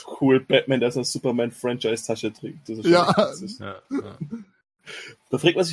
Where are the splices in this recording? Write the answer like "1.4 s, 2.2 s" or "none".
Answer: none